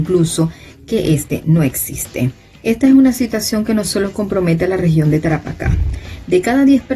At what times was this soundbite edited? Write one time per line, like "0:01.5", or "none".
none